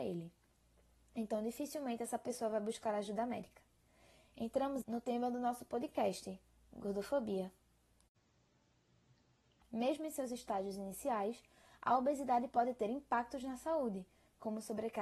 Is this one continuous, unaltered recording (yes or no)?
no